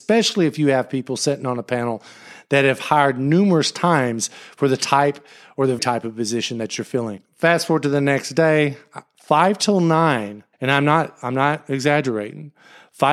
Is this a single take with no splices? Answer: no; 2 cuts; at 5.8 s, 10.5 s

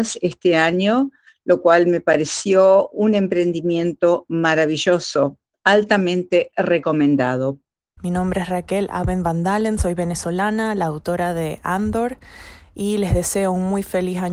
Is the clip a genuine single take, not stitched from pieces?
no; 1 cut; at 8.0 s

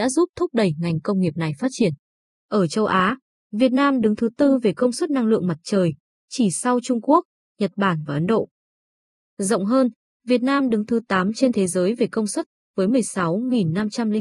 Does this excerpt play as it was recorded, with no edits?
yes; 0 cuts

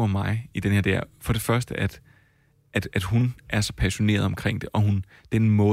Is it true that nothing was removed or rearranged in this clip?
yes; 0 cuts

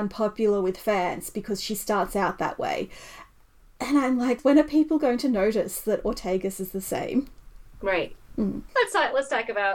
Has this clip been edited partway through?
yes; 1 cut; at 8.7 s

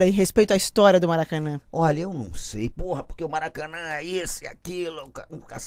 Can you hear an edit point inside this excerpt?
yes; 1 cut; at 2.7 s

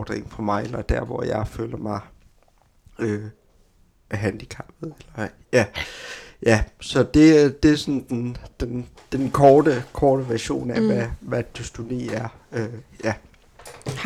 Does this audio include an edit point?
no; 0 cuts

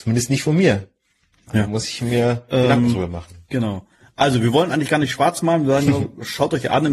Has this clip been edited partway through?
no; 0 cuts

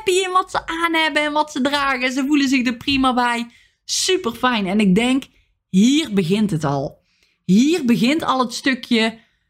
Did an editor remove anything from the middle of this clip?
no; 0 cuts

